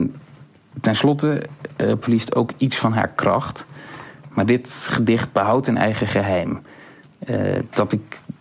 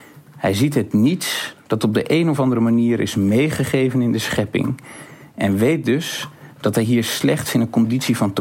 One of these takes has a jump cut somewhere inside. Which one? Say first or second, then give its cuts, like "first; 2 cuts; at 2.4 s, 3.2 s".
first; 1 cut; at 2.0 s